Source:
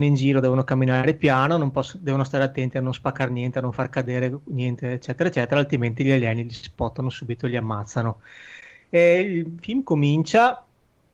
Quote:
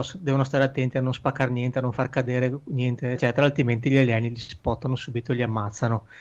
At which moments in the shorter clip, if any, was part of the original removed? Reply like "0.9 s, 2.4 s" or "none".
3.2 s